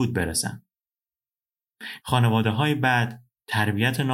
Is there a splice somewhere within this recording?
yes; 1 cut; at 2.0 s

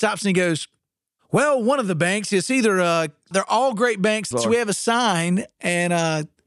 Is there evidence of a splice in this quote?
yes; 2 cuts; at 3.3 s, 4.3 s

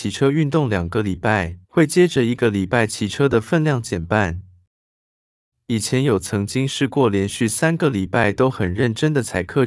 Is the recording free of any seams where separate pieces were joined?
no; 2 cuts; at 1.6 s, 5.5 s

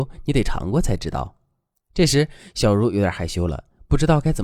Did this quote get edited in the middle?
no; 0 cuts

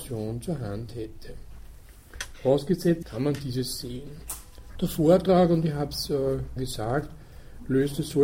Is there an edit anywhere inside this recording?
yes; 3 cuts; at 3.0 s, 4.8 s, 6.6 s

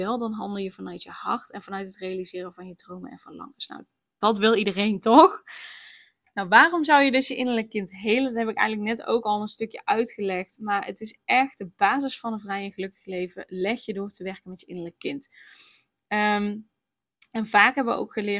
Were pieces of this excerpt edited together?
no; 0 cuts

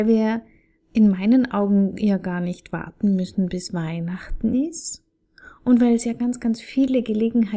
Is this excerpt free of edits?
yes; 0 cuts

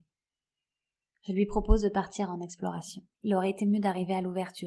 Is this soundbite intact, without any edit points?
no; 1 cut; at 3.1 s

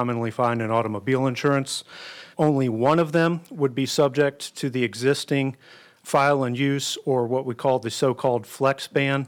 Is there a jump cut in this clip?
yes; 2 cuts; at 2.3 s, 6.0 s

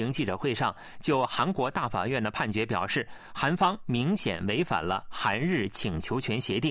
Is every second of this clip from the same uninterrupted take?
yes; 0 cuts

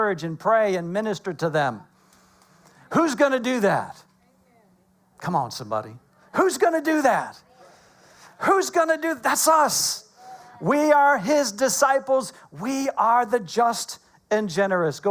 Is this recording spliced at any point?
no; 0 cuts

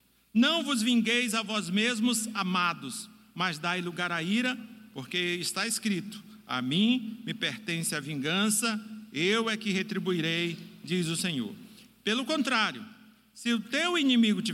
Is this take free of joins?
yes; 0 cuts

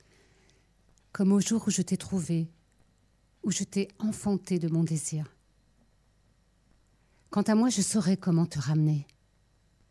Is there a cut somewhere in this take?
no; 0 cuts

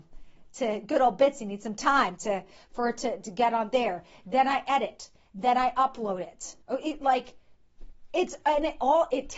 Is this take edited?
yes; 1 cut; at 6.6 s

